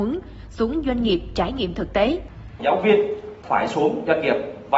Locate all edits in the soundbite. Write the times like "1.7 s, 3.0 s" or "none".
2.6 s